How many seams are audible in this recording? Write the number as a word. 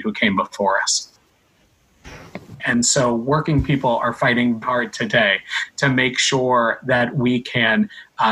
two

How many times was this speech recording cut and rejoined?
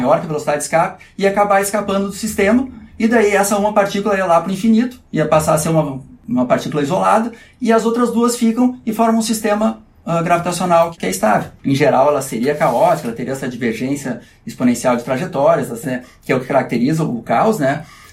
two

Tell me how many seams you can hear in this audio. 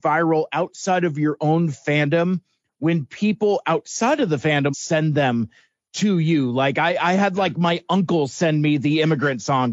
one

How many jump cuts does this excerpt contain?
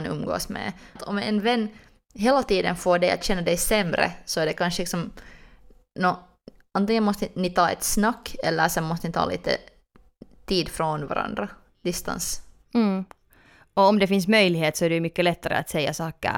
one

